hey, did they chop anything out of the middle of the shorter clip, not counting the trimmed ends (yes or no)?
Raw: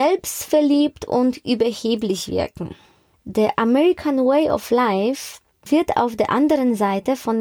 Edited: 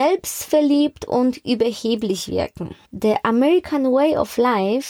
yes